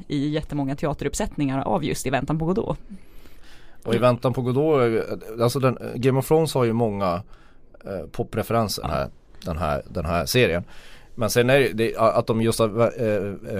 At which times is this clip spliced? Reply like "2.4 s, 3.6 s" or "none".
8.8 s